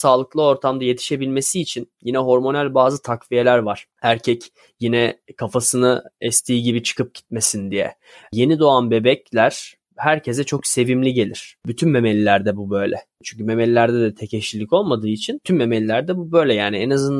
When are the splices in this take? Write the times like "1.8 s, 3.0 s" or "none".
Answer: 3.9 s